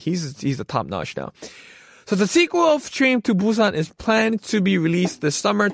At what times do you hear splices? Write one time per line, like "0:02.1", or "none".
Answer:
none